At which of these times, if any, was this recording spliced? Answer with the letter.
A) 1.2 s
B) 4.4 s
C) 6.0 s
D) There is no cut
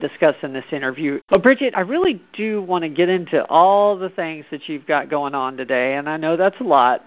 A